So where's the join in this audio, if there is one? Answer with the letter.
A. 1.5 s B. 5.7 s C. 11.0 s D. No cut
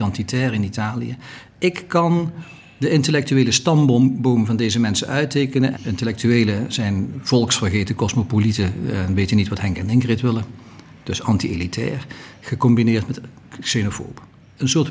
B